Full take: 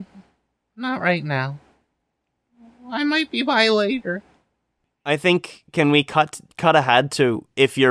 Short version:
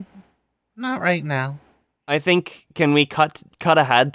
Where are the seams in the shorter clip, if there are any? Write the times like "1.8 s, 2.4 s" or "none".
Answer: 1.9 s